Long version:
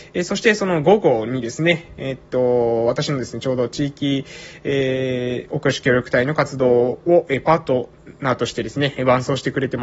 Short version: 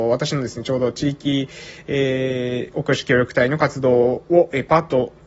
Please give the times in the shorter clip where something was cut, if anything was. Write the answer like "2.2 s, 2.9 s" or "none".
none